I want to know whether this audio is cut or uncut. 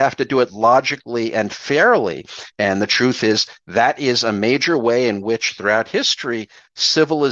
cut